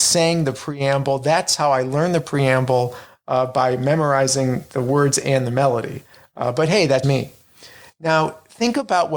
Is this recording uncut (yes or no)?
no